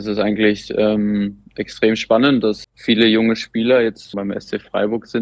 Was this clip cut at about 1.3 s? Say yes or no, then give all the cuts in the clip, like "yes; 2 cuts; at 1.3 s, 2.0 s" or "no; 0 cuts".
no; 2 cuts; at 2.6 s, 4.1 s